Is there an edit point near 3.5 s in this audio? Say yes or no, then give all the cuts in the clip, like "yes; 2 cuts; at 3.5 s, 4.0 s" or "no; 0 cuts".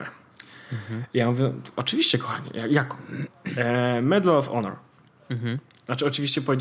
no; 0 cuts